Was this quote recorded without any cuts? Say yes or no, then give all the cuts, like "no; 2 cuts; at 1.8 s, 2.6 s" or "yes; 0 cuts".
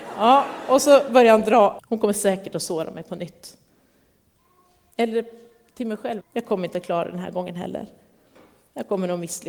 no; 2 cuts; at 1.8 s, 6.2 s